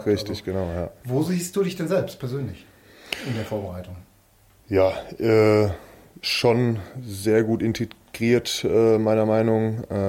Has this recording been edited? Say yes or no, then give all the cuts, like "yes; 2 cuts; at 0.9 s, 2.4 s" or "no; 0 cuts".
no; 0 cuts